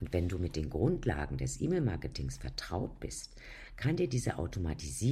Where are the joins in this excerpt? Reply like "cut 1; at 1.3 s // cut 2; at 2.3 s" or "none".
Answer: none